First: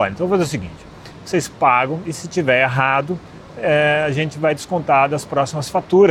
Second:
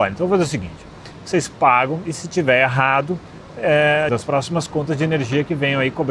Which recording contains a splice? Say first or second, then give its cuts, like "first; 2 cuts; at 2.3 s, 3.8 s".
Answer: second; 1 cut; at 4.1 s